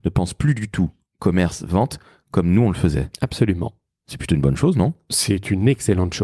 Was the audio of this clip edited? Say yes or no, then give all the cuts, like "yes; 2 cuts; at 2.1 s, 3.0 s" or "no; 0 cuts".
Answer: no; 0 cuts